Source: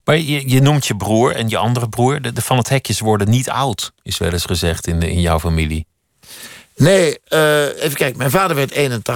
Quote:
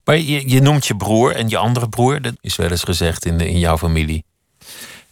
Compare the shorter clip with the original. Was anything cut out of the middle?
yes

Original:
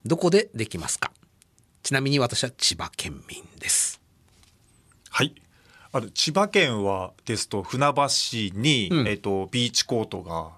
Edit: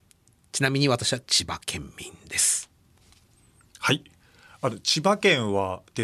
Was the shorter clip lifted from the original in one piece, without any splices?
yes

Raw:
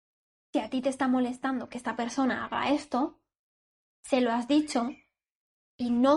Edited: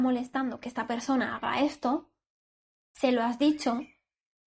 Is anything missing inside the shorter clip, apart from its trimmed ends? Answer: no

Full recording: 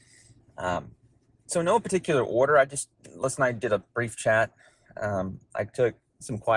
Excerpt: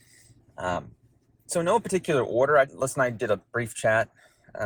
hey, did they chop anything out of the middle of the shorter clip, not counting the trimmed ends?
yes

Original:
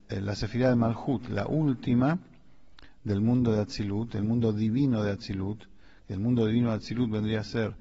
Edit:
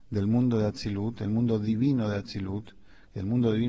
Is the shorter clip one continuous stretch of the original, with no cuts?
yes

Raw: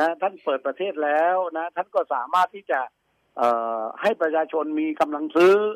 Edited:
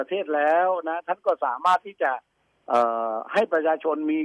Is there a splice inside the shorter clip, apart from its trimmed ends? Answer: no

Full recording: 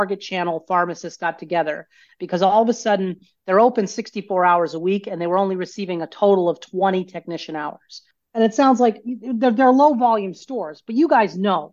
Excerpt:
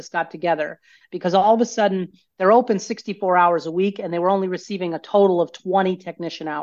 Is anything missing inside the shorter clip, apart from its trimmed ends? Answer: no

